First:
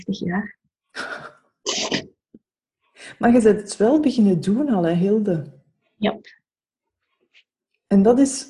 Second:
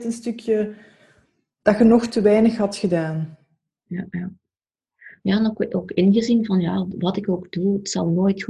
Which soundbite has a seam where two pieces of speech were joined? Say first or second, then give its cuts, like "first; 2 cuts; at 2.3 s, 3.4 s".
second; 1 cut; at 6.9 s